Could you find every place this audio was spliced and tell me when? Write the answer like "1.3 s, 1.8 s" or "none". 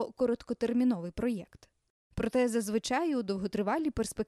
none